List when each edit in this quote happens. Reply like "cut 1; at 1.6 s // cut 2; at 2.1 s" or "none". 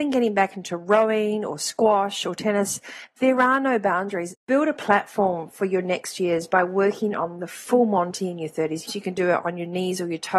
cut 1; at 4.3 s // cut 2; at 8.9 s